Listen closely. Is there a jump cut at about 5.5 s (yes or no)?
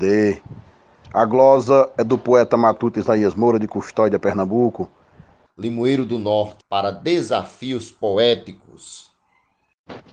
yes